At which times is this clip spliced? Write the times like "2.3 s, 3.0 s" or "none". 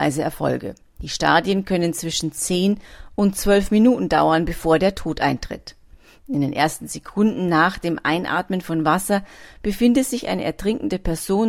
6.2 s